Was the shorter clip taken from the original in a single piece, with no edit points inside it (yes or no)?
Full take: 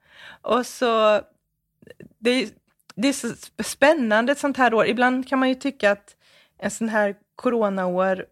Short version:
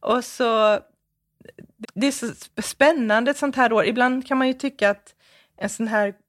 no